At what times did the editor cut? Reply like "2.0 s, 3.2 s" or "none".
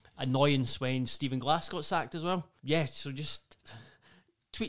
2.6 s